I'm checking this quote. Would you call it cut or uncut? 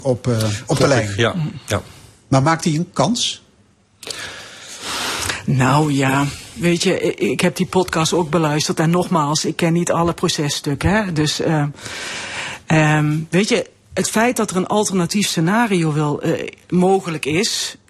uncut